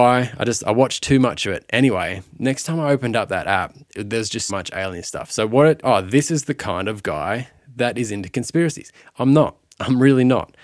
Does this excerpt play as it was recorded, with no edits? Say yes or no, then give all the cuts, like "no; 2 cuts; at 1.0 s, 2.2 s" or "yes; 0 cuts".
no; 2 cuts; at 4.5 s, 5.8 s